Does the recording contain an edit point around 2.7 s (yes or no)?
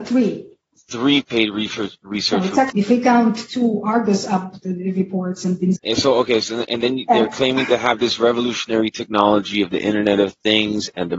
yes